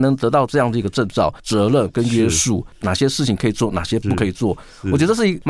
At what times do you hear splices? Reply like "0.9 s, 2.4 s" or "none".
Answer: 1.4 s